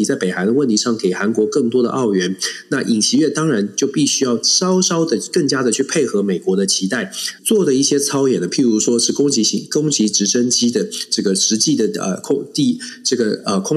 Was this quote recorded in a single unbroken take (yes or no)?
no